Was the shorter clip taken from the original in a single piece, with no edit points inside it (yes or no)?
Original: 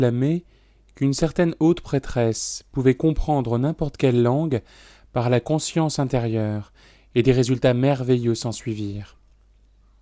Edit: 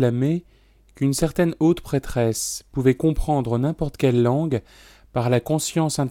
yes